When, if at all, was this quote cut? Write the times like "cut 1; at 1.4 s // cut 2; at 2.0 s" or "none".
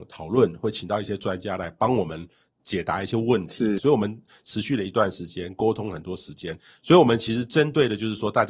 cut 1; at 3.8 s